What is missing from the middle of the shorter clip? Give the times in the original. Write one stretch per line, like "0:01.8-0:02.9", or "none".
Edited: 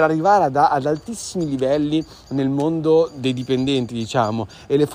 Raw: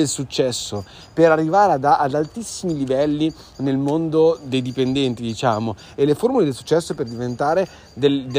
none